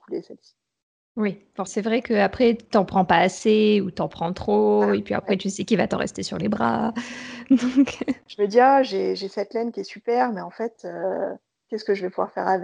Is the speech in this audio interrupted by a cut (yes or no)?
yes